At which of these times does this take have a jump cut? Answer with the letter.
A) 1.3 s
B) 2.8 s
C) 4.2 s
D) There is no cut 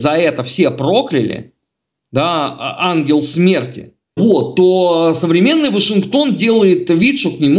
C